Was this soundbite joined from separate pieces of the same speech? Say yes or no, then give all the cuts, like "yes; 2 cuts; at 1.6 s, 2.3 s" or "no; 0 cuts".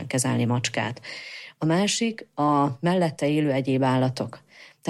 no; 0 cuts